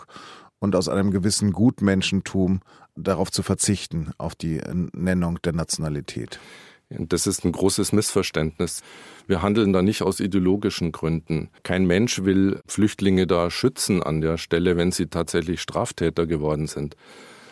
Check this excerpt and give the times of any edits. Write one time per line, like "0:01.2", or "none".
0:11.6